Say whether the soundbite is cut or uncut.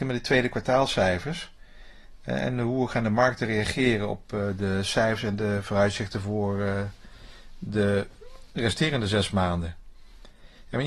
uncut